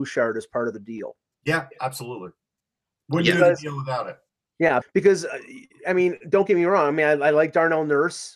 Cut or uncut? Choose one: cut